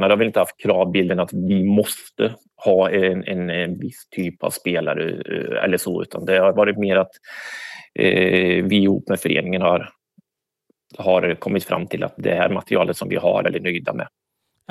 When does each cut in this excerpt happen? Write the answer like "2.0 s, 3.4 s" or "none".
12.2 s, 13.4 s